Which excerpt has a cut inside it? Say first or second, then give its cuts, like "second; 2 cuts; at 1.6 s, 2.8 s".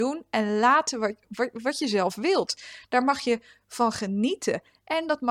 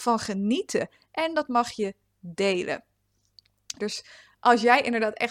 second; 1 cut; at 3.8 s